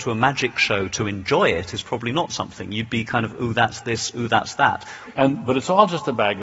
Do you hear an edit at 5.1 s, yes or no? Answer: yes